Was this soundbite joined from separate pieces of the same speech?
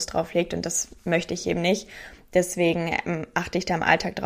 no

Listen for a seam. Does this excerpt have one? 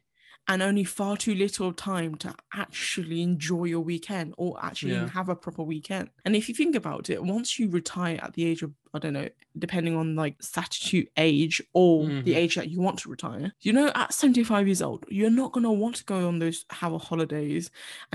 no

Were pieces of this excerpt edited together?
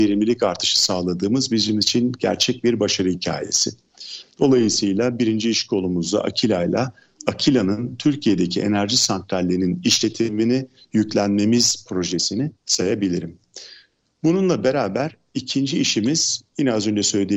yes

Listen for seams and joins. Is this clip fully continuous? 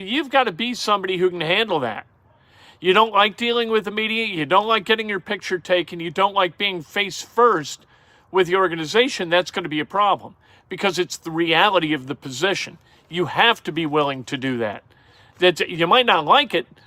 yes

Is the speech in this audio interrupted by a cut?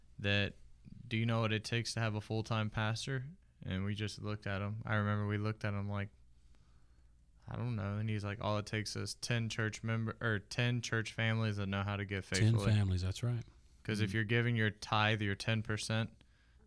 no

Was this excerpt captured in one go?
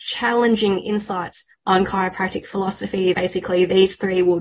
no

